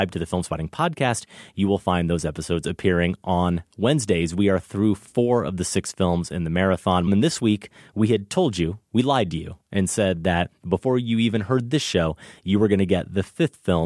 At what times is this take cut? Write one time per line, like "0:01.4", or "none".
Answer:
0:07.1